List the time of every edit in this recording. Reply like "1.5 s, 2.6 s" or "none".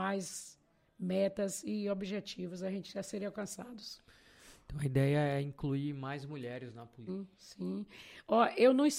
7.1 s